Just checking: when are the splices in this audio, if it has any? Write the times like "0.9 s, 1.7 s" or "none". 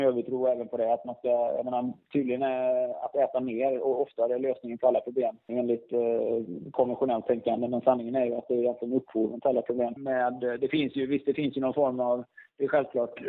5.5 s, 10.0 s